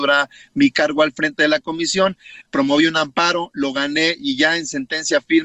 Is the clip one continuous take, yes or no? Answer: no